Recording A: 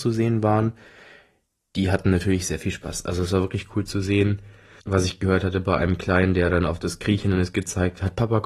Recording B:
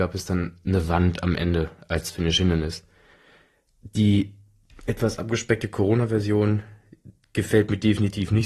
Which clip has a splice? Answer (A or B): A